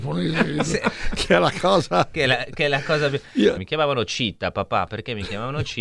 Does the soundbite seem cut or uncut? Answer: cut